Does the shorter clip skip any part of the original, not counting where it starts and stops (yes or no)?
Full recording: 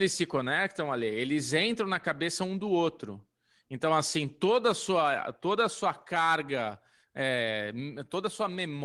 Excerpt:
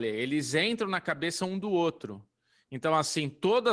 no